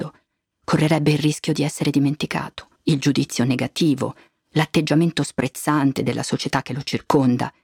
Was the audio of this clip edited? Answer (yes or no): yes